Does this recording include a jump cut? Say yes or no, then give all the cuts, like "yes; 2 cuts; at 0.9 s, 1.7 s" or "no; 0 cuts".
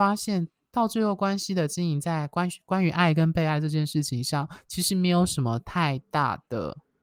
no; 0 cuts